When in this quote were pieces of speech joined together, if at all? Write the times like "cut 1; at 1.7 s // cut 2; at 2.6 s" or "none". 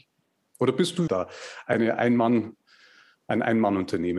cut 1; at 1.1 s